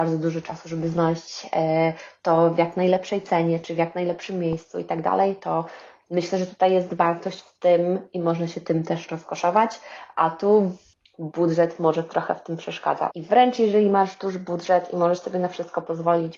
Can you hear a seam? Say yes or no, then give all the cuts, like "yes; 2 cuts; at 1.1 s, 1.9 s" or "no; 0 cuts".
yes; 1 cut; at 13.1 s